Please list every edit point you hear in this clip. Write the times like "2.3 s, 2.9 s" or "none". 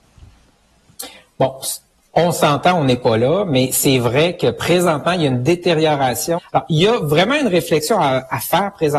6.4 s